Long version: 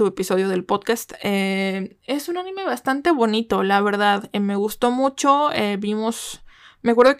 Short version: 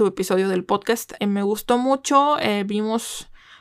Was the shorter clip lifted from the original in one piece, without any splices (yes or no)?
no